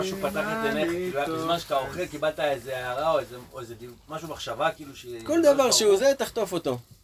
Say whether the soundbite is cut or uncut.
uncut